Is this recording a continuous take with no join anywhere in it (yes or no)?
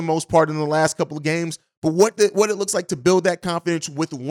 yes